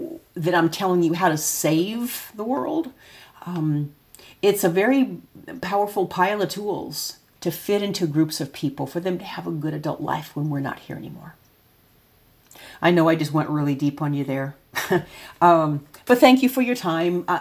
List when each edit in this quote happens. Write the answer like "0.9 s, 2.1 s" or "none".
7.4 s